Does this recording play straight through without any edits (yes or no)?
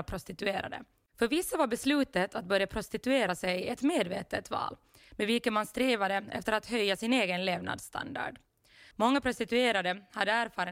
no